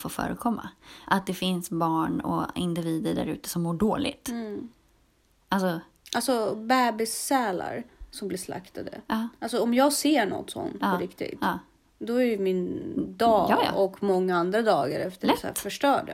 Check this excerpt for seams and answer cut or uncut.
uncut